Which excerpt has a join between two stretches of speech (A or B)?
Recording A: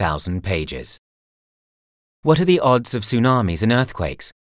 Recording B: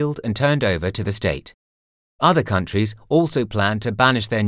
A